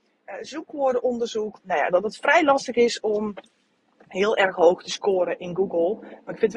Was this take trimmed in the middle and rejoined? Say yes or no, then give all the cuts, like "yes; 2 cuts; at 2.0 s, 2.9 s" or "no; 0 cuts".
yes; 1 cut; at 1.6 s